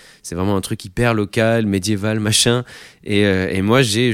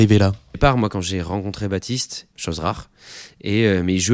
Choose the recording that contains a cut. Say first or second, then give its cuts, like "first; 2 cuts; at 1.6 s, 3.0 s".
second; 1 cut; at 2.3 s